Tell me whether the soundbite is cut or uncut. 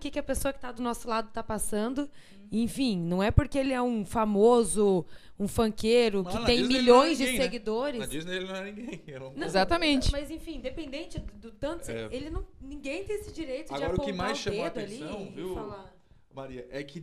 uncut